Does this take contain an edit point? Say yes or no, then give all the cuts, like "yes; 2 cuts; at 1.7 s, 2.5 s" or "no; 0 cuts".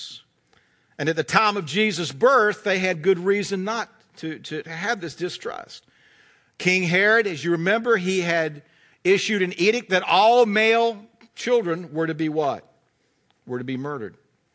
no; 0 cuts